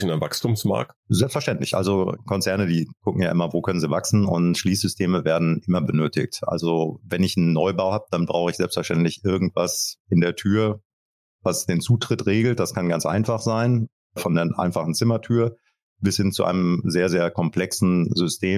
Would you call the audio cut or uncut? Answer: cut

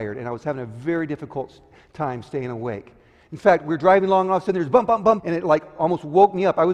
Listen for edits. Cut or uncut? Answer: cut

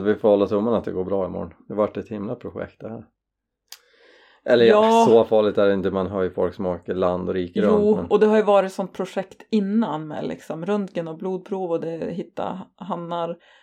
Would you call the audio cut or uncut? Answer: uncut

